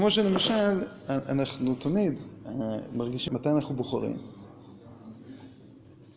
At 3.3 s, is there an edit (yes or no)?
yes